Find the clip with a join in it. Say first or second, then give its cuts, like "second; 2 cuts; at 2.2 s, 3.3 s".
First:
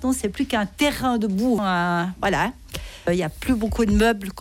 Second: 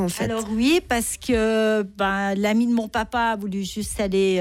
first; 1 cut; at 1.6 s